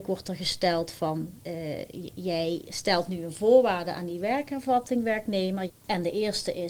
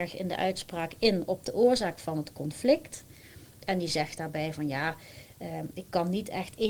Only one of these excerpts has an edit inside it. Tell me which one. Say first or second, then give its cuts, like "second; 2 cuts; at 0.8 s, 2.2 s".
first; 2 cuts; at 1.4 s, 5.7 s